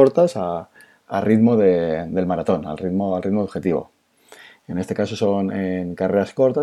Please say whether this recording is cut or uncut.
uncut